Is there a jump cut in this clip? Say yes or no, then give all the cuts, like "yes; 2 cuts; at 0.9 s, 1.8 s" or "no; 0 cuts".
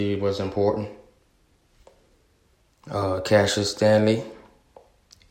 no; 0 cuts